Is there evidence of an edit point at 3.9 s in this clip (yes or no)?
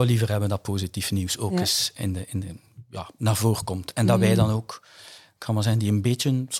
no